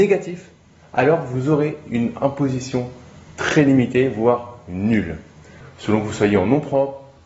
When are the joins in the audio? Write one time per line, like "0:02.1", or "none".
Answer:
0:05.6